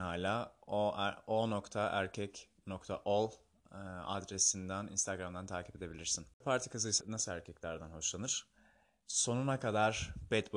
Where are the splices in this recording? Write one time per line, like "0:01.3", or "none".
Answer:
0:07.0